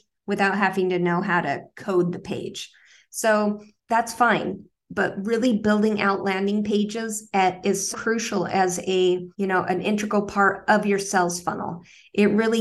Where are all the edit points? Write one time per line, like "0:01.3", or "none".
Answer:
0:03.8
0:07.9
0:09.3